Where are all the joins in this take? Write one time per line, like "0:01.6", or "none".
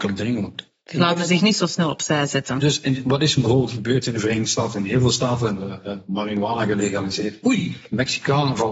none

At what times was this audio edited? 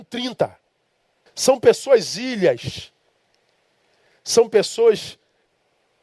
0:01.3

